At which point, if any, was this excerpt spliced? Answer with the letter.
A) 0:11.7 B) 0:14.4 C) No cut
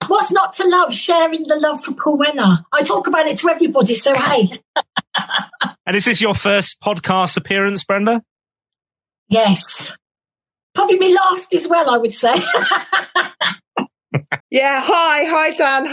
B